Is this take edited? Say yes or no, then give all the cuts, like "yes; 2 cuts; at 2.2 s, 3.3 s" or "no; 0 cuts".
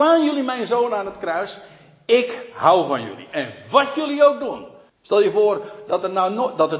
yes; 1 cut; at 4.9 s